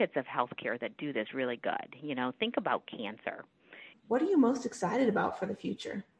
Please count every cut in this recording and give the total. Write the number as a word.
one